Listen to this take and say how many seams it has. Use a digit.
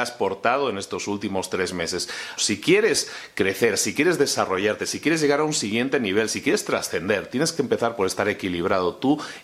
1